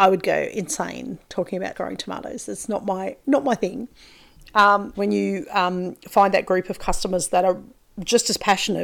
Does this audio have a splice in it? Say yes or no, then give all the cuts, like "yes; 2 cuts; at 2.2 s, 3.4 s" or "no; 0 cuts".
yes; 2 cuts; at 1.7 s, 4.9 s